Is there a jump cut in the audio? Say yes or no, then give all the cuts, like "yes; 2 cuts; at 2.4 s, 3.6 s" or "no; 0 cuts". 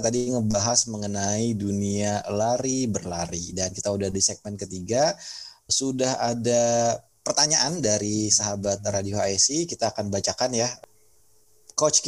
yes; 1 cut; at 5.7 s